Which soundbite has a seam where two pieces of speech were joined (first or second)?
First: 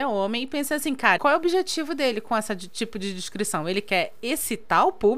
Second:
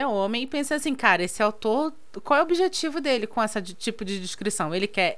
first